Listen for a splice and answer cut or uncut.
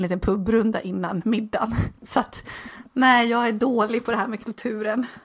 uncut